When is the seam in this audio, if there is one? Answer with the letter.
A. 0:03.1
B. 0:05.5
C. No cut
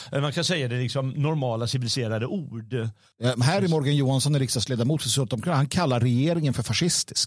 A